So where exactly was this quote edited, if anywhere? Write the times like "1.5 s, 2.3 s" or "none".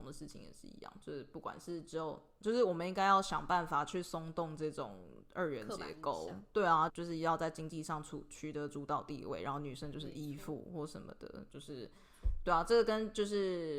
2.4 s, 6.9 s